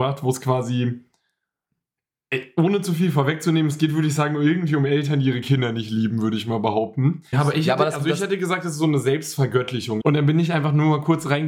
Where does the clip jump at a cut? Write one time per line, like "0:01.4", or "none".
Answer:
0:07.3
0:10.0